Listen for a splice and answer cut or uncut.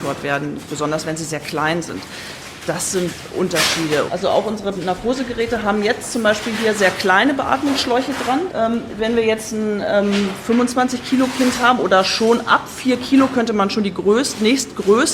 cut